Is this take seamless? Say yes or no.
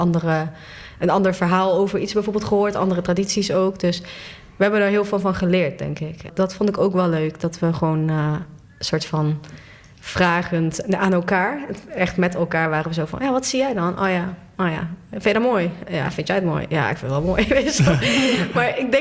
no